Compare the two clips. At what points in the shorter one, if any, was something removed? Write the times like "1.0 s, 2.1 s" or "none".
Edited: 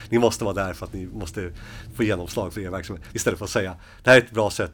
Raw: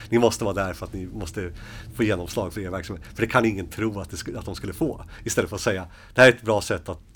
3.1 s